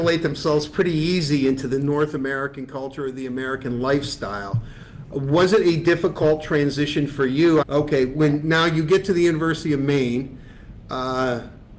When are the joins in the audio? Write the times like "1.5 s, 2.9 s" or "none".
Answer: 7.6 s